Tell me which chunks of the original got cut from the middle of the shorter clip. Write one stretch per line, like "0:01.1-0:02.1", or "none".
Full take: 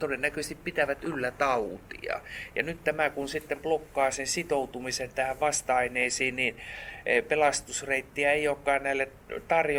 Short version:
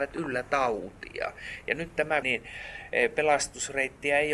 0:03.1-0:06.4

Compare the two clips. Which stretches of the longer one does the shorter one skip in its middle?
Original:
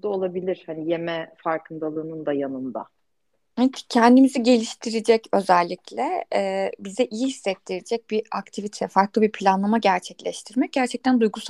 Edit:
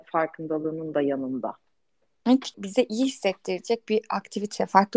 0:03.9-0:06.8

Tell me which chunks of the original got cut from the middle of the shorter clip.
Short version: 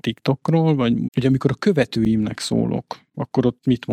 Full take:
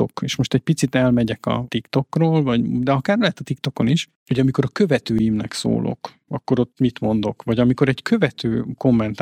0:02.7-0:04.2

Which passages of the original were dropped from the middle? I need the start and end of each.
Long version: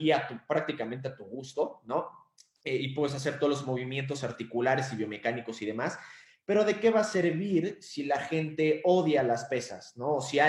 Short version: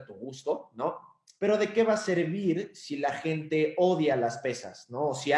0:02.5-0:06.4

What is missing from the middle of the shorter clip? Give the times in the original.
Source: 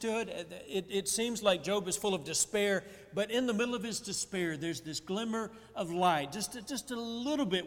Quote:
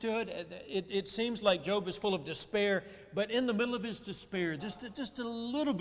0:04.6-0:06.3

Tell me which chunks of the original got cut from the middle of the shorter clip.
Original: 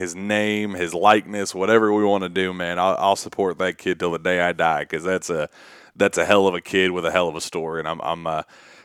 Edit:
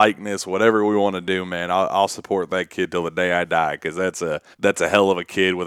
0:05.6-0:05.9

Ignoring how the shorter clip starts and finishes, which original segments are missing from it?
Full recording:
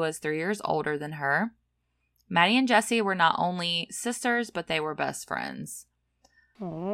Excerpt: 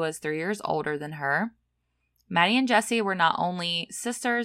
none

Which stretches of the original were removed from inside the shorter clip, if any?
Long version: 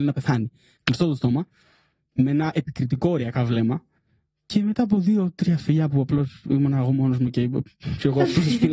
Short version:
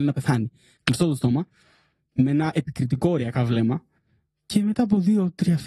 none

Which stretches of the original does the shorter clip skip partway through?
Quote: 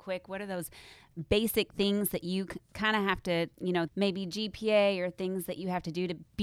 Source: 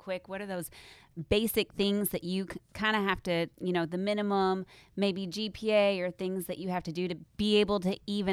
0:03.9-0:04.9

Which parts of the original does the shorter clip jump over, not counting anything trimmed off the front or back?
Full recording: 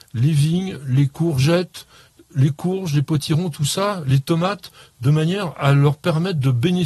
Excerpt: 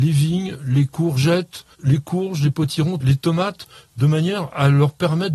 0:01.9-0:02.2
0:03.5-0:04.0

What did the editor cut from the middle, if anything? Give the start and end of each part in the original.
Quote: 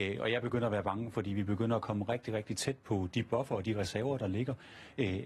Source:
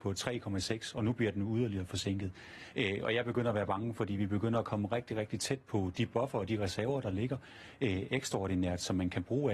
none

